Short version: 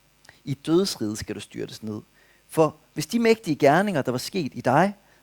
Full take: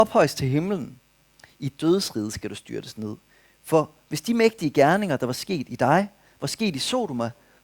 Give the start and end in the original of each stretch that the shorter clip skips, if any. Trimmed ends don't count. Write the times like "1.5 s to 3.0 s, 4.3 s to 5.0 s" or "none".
none